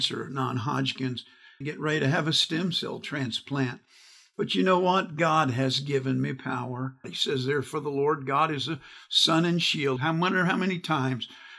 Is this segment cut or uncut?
cut